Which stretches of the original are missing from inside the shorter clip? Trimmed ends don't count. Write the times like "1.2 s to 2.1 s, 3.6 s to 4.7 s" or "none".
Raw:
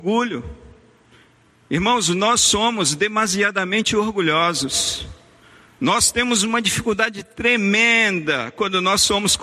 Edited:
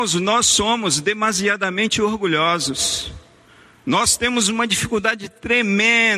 none

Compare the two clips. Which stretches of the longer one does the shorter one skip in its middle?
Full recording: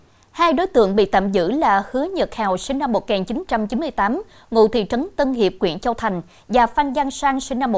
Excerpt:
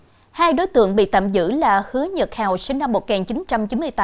none

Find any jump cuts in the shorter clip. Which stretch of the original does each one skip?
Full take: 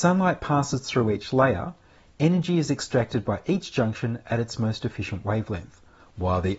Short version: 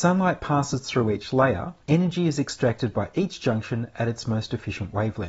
1.8 s to 2.1 s

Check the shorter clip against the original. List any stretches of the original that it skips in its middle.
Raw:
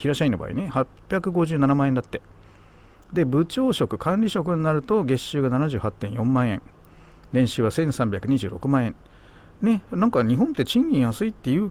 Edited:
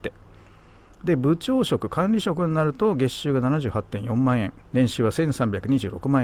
6.7 s to 7.3 s

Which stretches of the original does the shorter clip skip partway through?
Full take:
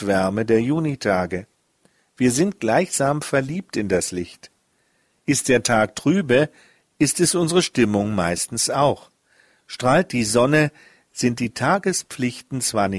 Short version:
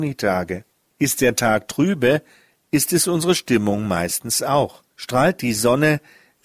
1.7 s to 5.2 s, 9.2 s to 9.6 s

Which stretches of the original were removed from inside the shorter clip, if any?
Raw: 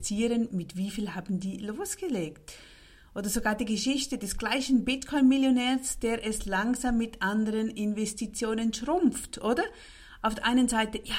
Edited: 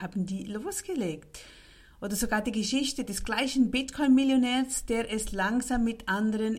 none

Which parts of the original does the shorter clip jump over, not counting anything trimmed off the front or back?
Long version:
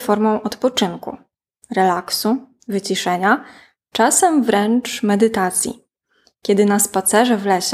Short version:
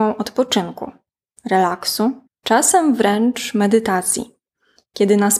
2.5 s to 3.7 s

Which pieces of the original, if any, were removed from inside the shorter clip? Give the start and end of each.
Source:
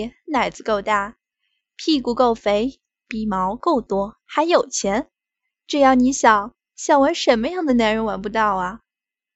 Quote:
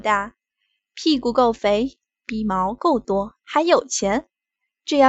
none

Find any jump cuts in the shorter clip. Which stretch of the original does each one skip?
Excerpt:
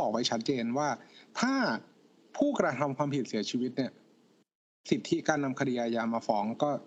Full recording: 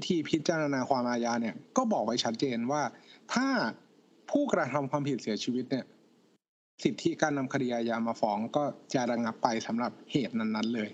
none

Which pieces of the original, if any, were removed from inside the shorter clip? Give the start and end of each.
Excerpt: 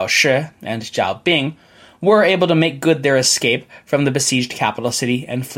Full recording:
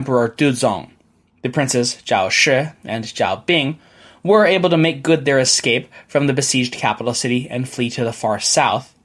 none

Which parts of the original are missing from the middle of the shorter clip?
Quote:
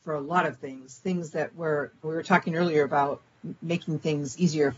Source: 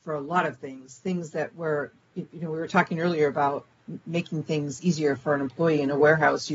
2.0 s to 2.5 s

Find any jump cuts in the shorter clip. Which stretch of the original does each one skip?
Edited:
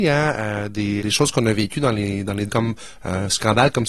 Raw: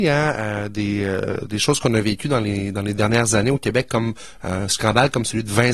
1.0 s to 1.5 s, 3.0 s to 3.9 s

